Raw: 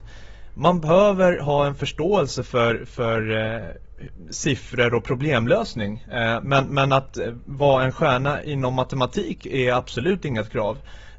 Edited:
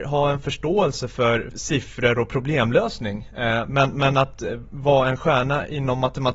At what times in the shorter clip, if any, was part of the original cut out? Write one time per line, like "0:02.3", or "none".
0:01.5